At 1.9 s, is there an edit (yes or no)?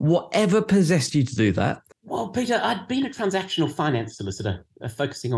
yes